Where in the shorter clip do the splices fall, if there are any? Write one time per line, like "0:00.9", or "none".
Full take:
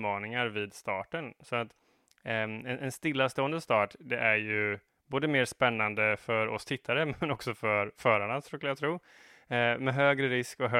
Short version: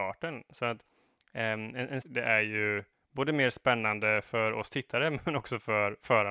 0:02.0